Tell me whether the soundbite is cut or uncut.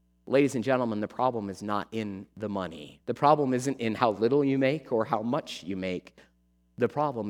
cut